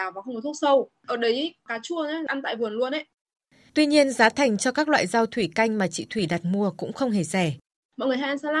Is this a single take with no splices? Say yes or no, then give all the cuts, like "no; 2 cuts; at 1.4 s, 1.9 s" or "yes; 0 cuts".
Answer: yes; 0 cuts